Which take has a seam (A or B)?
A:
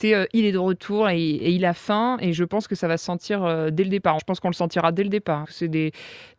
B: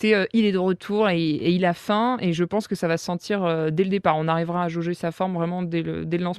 A